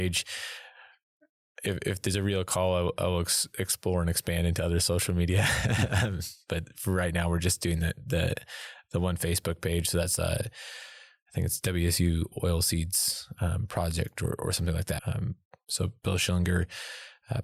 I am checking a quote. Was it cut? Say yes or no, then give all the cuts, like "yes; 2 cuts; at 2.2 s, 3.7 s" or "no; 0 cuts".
yes; 1 cut; at 15.0 s